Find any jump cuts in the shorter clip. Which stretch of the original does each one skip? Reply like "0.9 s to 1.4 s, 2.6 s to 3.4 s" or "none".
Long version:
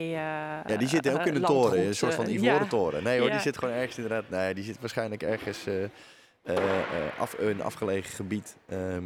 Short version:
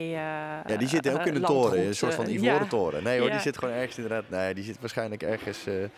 none